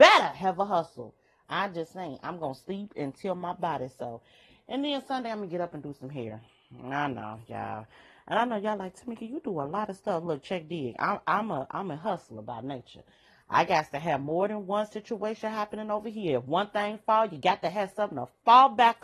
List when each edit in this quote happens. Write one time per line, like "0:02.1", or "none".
0:01.4